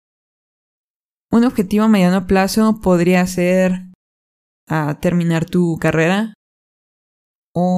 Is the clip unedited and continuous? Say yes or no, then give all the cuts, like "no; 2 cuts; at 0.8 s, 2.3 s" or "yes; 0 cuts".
yes; 0 cuts